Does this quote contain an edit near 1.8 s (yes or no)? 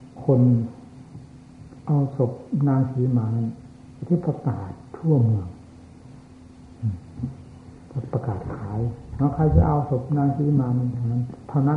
yes